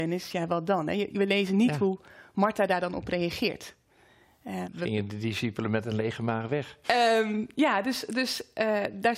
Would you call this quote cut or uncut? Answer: cut